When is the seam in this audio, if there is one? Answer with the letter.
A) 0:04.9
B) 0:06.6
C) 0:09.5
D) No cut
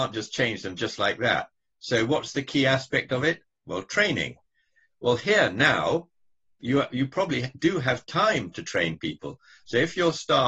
B